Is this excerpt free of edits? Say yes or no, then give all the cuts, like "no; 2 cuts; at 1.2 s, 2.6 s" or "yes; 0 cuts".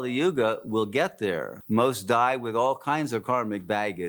no; 1 cut; at 1.6 s